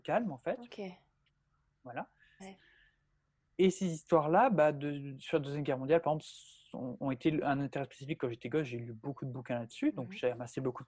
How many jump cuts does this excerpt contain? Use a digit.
1